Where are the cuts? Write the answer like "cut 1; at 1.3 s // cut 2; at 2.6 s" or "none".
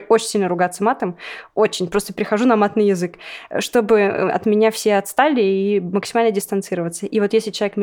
none